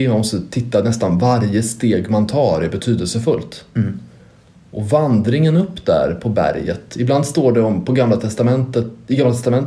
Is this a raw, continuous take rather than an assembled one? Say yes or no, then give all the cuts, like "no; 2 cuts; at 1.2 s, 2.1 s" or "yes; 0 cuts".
yes; 0 cuts